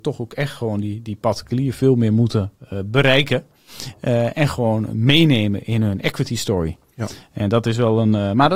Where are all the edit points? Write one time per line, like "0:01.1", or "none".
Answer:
none